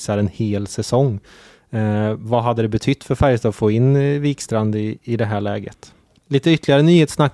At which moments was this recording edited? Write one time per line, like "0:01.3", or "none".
0:06.1